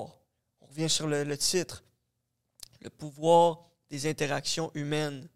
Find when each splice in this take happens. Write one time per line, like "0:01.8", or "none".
none